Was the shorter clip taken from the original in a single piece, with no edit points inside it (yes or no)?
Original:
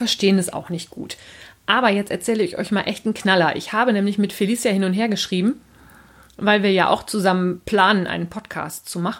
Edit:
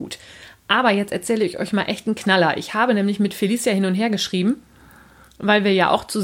yes